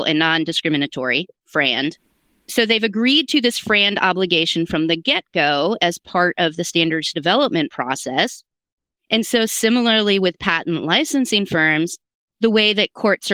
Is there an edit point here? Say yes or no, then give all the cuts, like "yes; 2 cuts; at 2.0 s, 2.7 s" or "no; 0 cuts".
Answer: no; 0 cuts